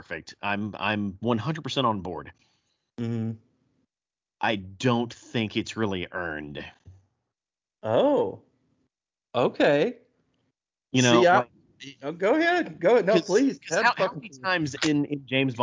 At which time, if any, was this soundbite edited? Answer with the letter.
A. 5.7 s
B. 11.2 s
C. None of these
C